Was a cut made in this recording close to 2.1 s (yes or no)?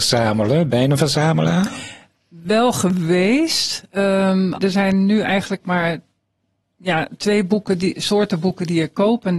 no